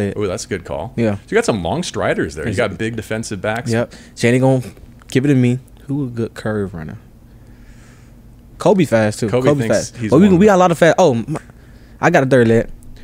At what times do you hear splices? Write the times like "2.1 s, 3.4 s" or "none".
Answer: 3.9 s, 5.7 s, 8.5 s